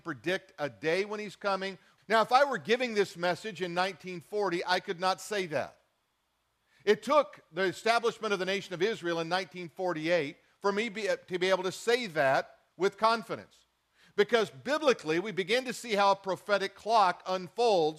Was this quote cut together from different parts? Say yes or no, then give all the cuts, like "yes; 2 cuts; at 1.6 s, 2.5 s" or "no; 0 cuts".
yes; 1 cut; at 2.0 s